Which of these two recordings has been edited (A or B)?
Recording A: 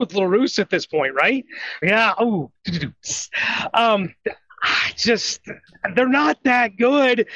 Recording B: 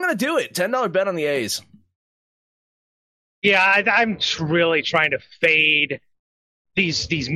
A